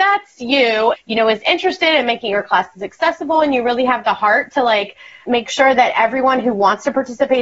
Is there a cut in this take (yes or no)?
yes